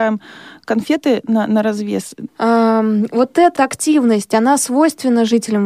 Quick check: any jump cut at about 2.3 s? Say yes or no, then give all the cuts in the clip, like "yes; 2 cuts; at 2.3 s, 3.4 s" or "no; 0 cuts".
yes; 2 cuts; at 2.3 s, 3.6 s